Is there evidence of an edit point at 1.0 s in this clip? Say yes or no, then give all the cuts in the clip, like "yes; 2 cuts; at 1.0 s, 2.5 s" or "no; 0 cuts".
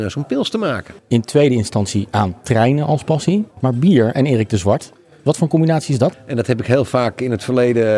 yes; 3 cuts; at 1.0 s, 3.5 s, 6.1 s